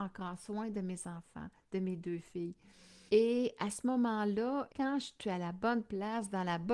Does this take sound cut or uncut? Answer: cut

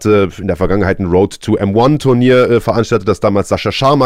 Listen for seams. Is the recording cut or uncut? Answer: uncut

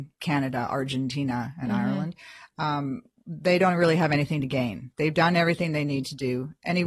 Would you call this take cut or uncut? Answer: uncut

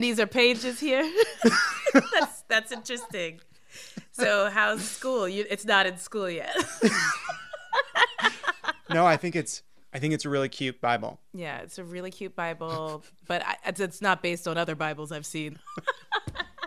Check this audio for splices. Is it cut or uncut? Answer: cut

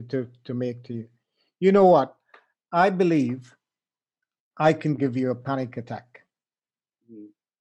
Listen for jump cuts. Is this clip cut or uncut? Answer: uncut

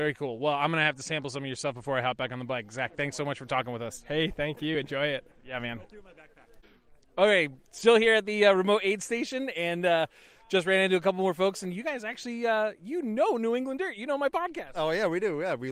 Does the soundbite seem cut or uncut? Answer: uncut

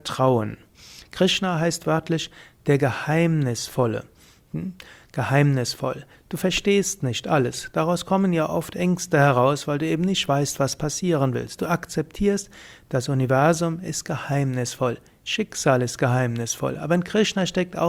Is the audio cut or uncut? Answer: cut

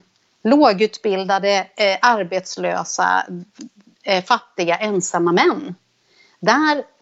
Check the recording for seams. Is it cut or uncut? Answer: uncut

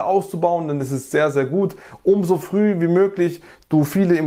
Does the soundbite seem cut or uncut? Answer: uncut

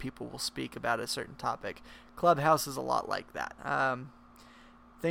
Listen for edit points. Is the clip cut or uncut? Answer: cut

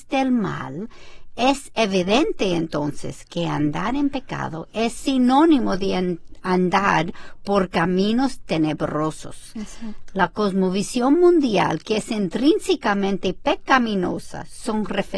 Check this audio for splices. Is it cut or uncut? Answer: uncut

